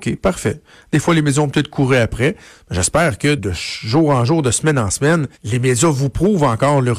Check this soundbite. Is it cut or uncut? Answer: cut